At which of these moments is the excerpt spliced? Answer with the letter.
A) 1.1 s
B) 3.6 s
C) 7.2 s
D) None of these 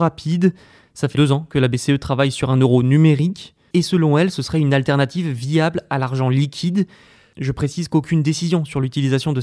A